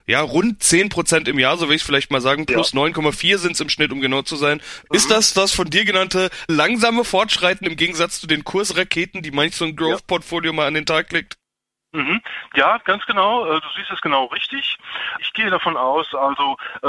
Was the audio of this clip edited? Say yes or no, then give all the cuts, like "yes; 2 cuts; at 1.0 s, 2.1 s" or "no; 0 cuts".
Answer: no; 0 cuts